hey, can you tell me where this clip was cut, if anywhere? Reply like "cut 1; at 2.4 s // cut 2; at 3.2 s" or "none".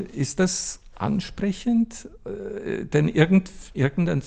none